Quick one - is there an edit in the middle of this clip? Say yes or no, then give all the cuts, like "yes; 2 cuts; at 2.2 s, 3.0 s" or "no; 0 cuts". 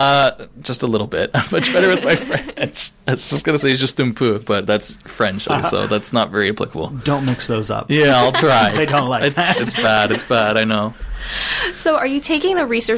yes; 1 cut; at 5.5 s